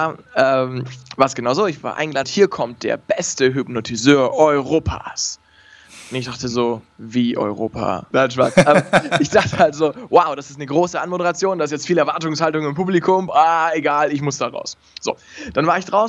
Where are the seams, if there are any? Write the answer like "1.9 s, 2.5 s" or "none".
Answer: 2.2 s, 8.1 s, 13.3 s